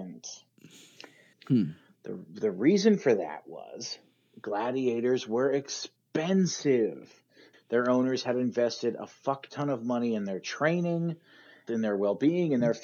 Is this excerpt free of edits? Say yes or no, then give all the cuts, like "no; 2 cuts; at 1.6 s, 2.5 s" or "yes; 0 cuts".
no; 3 cuts; at 1.3 s, 7.5 s, 11.7 s